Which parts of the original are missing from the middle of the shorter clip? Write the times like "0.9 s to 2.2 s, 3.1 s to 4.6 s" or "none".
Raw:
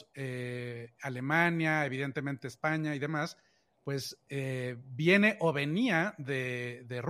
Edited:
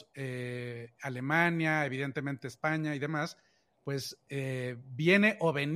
none